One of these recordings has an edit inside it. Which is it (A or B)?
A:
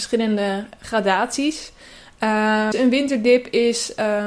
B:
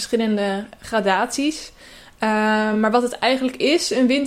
A